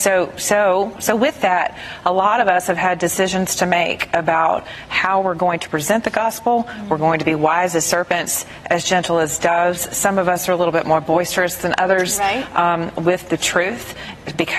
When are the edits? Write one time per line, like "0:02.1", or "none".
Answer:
none